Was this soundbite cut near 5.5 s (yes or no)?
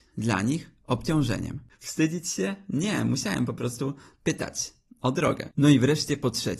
no